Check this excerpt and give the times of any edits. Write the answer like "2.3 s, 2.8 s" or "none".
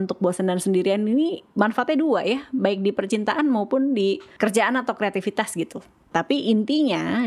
6.1 s